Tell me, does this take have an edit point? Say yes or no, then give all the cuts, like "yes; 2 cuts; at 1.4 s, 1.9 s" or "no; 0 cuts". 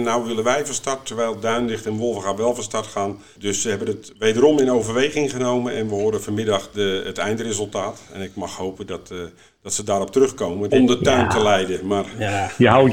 yes; 2 cuts; at 3.4 s, 10.7 s